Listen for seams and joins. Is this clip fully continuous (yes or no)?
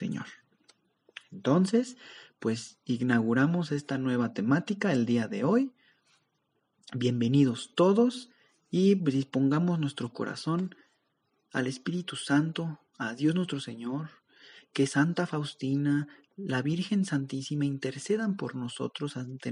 yes